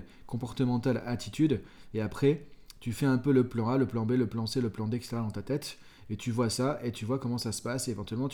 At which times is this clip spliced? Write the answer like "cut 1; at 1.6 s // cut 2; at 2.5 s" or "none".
none